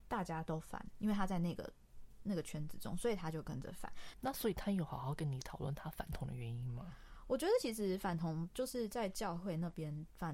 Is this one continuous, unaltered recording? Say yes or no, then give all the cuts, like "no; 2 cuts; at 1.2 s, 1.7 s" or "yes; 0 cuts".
no; 1 cut; at 4.1 s